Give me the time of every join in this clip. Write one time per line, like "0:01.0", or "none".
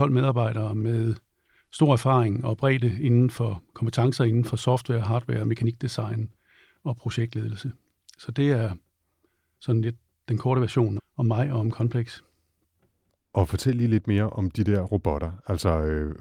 0:11.0